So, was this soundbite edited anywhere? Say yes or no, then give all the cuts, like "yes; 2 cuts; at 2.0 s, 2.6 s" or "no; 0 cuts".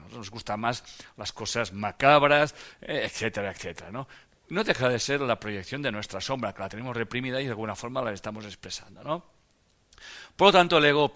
no; 0 cuts